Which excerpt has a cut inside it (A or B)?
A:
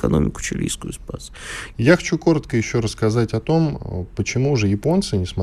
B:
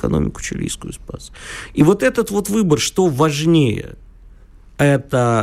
A